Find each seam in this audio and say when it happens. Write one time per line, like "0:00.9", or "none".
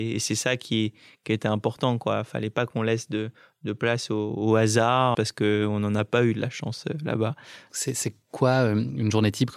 0:05.1
0:07.7